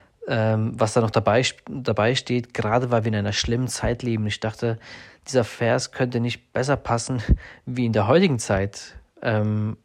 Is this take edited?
no; 0 cuts

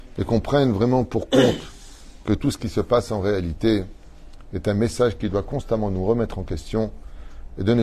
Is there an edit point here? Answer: no; 0 cuts

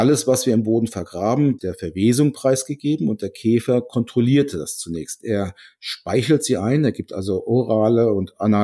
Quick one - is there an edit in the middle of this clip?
yes; 1 cut; at 1.6 s

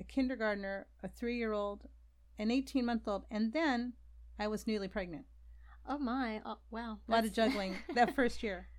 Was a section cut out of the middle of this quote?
no; 0 cuts

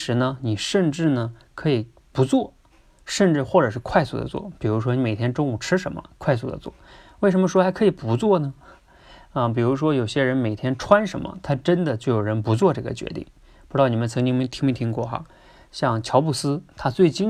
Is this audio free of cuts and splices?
yes; 0 cuts

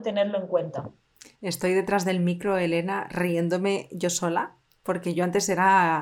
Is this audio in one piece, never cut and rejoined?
yes; 0 cuts

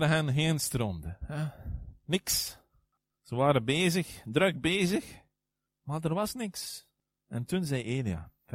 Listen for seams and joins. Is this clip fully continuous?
no; 1 cut; at 1.2 s

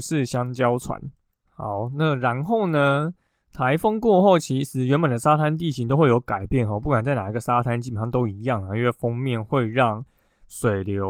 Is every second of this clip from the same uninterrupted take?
yes; 0 cuts

